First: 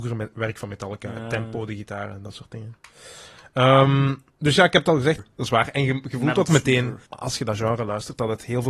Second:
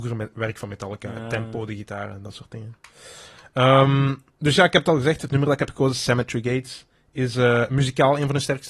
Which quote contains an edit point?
first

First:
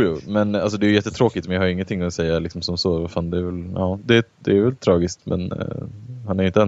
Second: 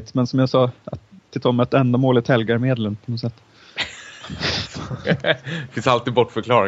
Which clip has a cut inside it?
first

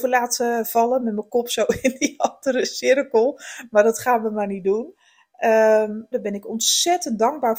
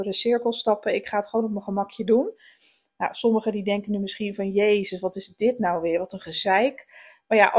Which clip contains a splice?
first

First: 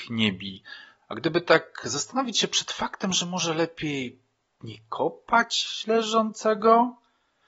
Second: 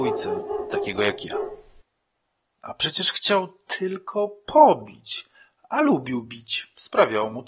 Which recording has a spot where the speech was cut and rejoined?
first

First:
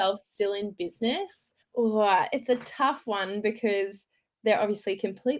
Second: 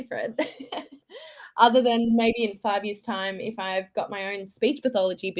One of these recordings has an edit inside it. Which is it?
first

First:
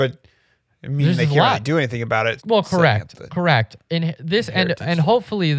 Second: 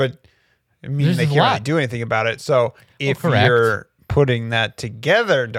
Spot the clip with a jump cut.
first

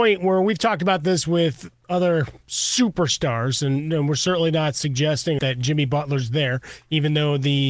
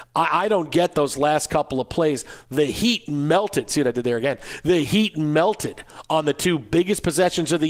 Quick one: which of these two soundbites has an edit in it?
first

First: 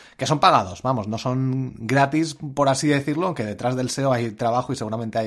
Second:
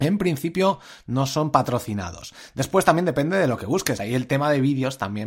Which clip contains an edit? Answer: second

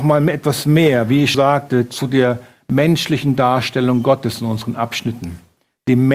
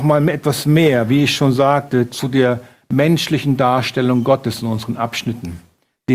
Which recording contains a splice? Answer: first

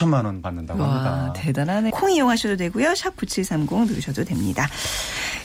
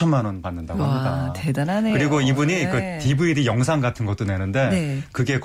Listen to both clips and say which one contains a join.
first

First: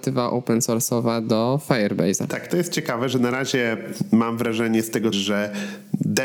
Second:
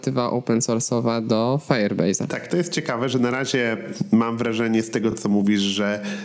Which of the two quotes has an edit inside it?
first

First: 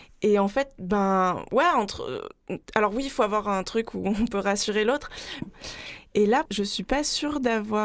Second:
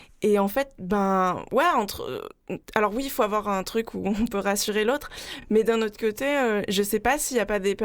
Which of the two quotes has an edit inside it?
first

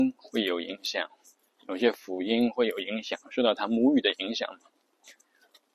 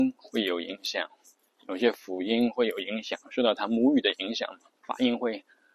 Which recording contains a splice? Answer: second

